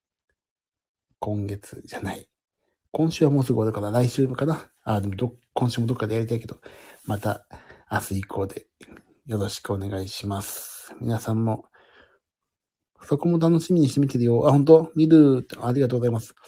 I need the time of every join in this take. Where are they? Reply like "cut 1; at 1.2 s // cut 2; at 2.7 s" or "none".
none

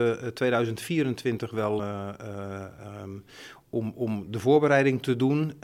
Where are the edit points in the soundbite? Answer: cut 1; at 1.8 s

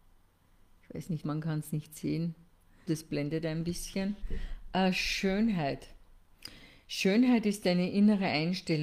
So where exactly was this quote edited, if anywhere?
cut 1; at 1.2 s // cut 2; at 2.9 s

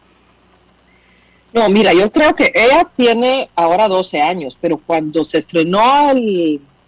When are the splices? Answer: none

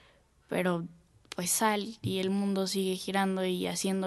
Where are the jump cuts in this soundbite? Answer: none

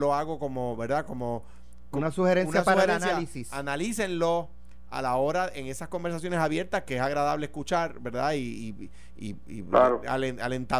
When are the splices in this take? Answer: none

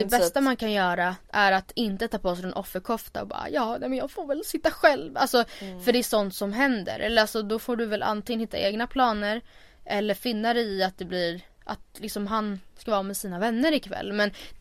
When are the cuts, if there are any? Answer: cut 1; at 1.2 s

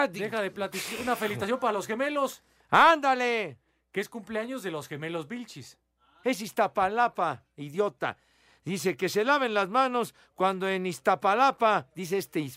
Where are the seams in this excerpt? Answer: cut 1; at 6.2 s

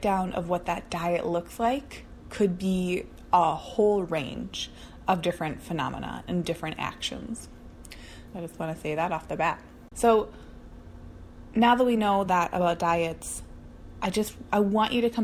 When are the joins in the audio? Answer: cut 1; at 8.3 s // cut 2; at 9.9 s

